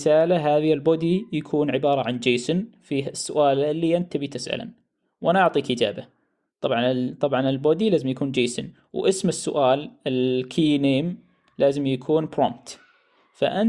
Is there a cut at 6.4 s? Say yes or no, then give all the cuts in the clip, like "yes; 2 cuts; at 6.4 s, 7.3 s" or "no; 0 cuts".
no; 0 cuts